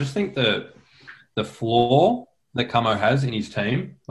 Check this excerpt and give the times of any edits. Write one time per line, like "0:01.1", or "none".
none